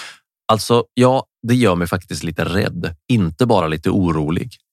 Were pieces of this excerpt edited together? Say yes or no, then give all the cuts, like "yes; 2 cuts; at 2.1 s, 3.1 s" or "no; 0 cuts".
no; 0 cuts